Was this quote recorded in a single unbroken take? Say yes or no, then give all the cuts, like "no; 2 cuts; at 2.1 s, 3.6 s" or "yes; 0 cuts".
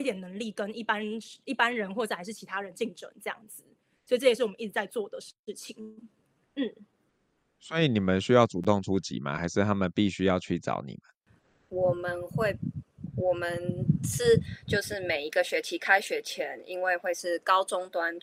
yes; 0 cuts